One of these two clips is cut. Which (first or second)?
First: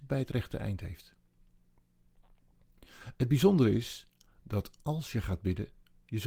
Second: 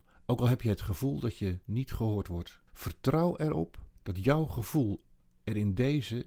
second